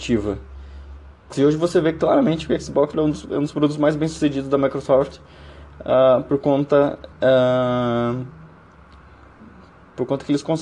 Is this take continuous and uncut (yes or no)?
no